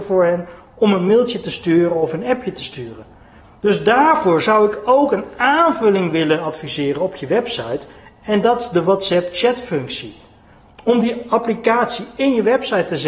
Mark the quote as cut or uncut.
uncut